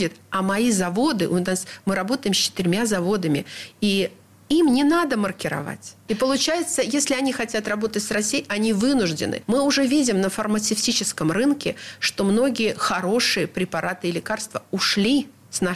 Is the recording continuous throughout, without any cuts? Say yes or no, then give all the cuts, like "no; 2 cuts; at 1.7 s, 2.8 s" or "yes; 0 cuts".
yes; 0 cuts